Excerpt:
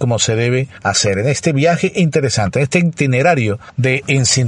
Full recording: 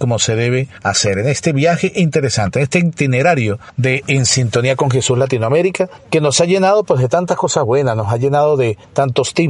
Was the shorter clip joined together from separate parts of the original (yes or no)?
no